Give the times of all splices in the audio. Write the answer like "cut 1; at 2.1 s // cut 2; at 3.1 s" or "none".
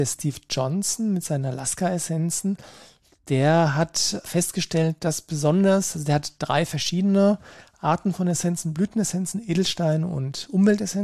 cut 1; at 4.2 s